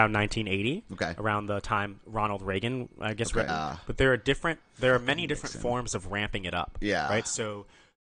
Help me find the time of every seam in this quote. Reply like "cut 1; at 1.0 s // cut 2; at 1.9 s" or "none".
cut 1; at 3.5 s